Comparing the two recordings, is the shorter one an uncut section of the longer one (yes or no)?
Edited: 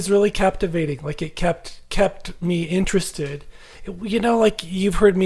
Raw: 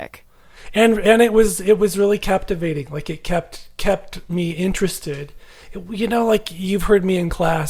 yes